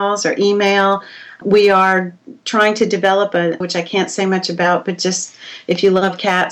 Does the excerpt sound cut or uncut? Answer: cut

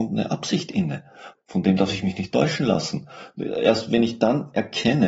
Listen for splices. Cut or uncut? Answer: cut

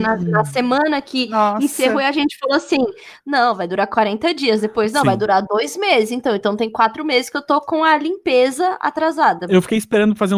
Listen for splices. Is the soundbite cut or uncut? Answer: uncut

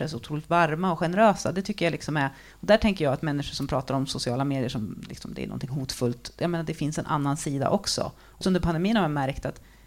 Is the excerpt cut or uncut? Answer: cut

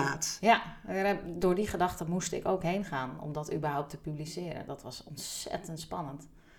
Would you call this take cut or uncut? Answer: uncut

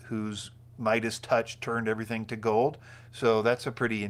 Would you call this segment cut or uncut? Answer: uncut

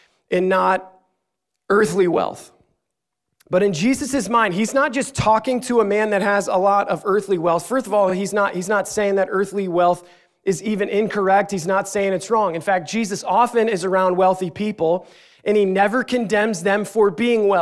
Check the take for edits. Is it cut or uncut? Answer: uncut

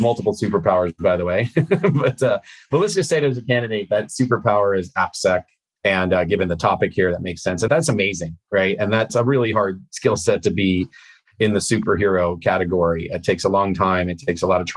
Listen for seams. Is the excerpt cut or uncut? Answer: uncut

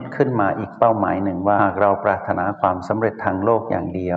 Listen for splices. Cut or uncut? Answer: cut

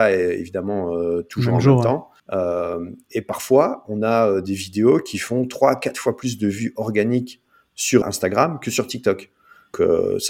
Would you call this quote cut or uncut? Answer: cut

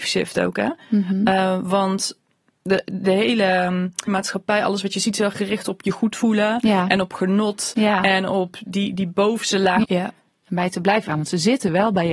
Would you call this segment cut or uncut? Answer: cut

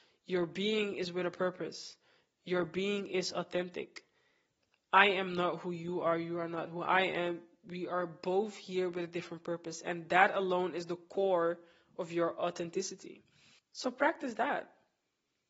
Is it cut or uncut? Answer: uncut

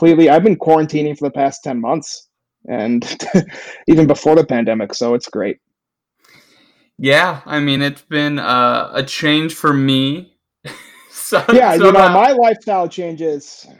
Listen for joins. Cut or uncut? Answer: uncut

